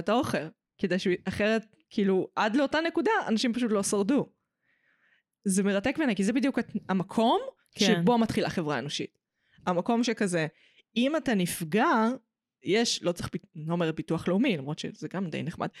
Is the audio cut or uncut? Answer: uncut